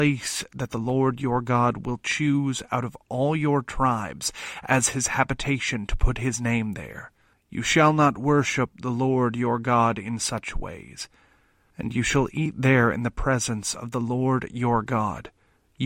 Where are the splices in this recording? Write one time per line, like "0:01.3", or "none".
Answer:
0:07.3
0:11.7